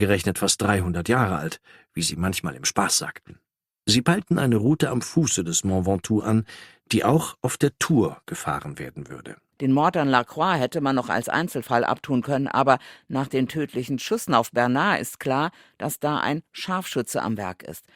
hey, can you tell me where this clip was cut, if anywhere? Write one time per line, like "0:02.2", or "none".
none

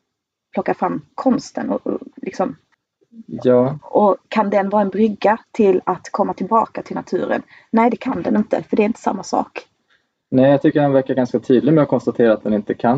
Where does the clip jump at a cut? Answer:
none

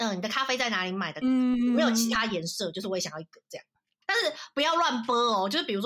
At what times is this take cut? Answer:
0:01.2
0:04.0

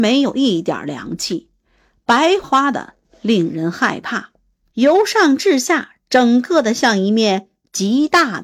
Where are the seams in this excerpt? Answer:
0:02.4
0:04.7

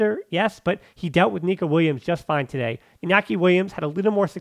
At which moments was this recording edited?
0:03.0

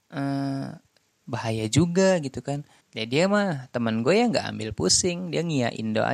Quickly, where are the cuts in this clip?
0:01.2
0:02.8

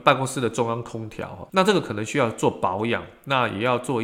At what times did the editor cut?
0:01.5

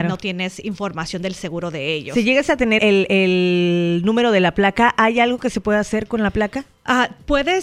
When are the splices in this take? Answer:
0:02.8

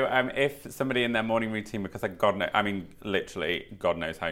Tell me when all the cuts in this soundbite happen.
none

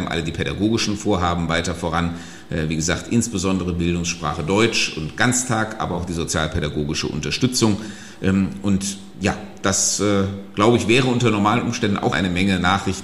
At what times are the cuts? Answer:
0:12.1

